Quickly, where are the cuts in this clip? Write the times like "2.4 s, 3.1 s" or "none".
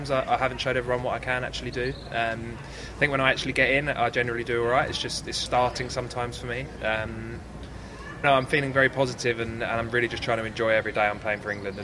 5.5 s, 8.2 s